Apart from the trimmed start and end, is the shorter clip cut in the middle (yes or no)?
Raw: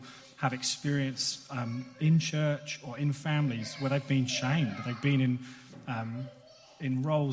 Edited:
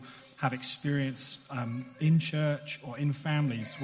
no